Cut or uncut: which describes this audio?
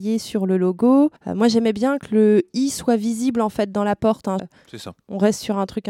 cut